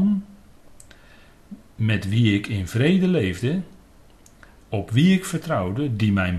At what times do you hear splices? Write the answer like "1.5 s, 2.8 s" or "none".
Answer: none